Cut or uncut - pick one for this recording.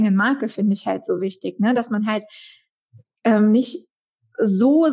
uncut